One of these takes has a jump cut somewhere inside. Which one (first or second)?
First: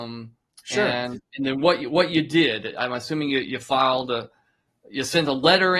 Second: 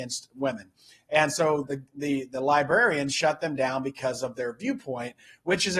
second